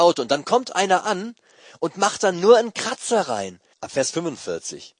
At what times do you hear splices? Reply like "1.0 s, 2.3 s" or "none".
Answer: 3.7 s

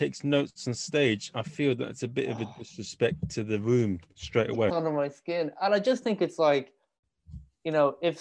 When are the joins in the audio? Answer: 4.7 s

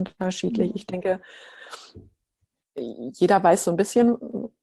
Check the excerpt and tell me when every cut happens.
none

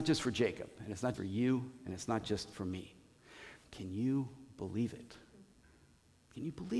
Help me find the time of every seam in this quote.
1.1 s, 3.6 s

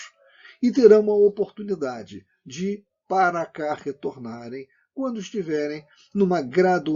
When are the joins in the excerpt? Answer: none

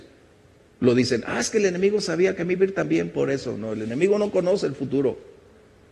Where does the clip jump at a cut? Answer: none

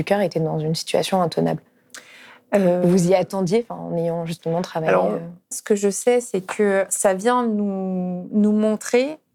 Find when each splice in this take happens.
5.5 s

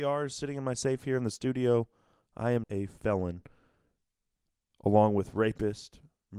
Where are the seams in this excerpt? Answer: 2.6 s

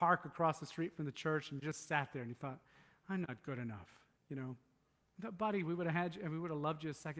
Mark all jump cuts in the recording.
none

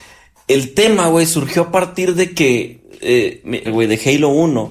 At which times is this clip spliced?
3.7 s

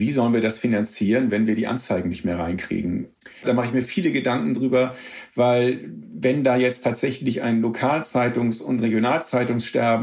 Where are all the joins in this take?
3.4 s

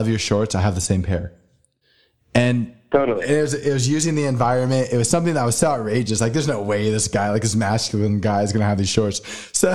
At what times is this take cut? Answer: none

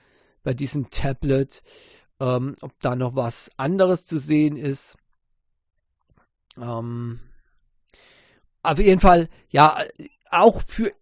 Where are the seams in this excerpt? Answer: none

